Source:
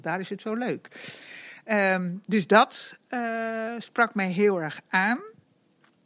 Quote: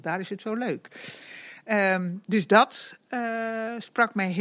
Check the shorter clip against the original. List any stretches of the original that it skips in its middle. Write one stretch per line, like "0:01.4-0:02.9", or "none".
none